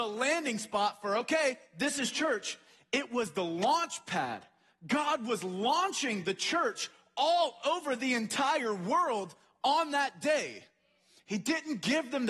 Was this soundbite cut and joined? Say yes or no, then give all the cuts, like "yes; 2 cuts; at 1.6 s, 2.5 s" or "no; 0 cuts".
no; 0 cuts